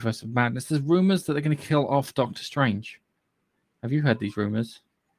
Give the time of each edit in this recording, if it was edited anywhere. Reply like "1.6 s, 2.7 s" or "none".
none